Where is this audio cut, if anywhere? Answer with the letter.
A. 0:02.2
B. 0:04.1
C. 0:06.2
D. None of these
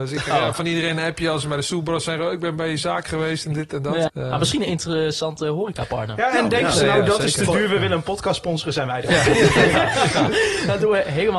B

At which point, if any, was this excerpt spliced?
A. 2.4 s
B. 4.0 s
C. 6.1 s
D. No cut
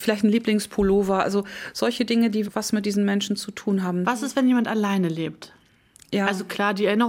A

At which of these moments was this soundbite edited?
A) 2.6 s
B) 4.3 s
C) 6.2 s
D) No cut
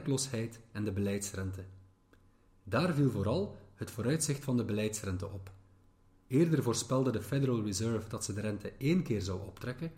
D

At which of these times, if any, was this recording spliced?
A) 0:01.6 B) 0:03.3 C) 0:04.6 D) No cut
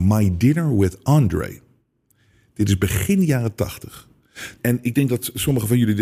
C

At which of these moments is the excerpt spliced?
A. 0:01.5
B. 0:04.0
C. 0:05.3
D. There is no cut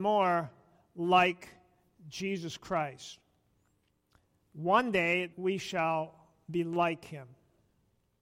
C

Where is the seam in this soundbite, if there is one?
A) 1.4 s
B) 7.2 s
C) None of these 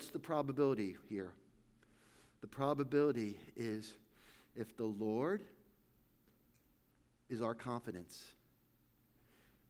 C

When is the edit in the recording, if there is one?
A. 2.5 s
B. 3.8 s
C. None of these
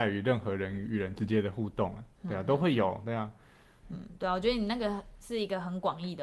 B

